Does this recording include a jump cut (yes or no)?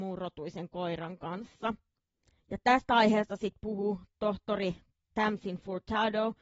yes